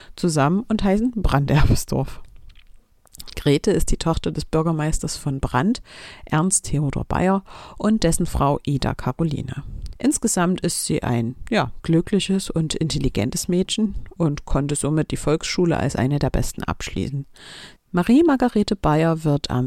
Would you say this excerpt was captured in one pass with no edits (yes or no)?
no